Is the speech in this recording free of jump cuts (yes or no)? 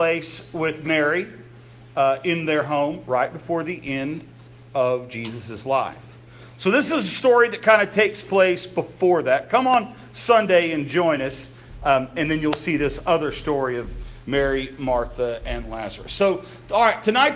yes